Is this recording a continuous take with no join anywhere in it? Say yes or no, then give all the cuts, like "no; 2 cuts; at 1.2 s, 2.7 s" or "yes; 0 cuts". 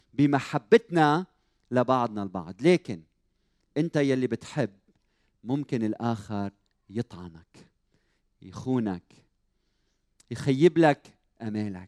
yes; 0 cuts